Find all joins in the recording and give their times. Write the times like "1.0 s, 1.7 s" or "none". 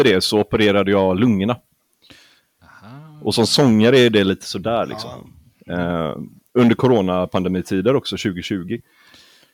none